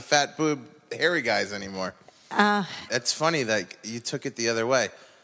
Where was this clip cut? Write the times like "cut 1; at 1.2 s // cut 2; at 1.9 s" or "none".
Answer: cut 1; at 2.9 s

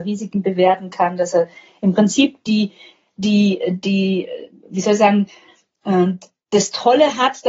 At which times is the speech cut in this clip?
none

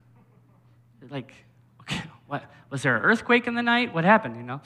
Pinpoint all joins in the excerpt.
none

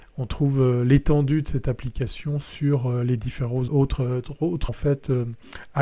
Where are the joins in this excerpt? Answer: cut 1; at 3.7 s // cut 2; at 4.7 s

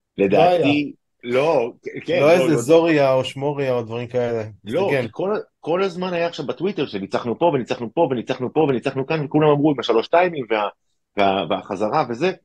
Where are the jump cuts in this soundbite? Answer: cut 1; at 1.1 s

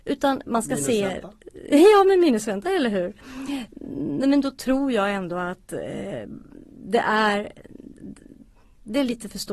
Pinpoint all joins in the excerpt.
none

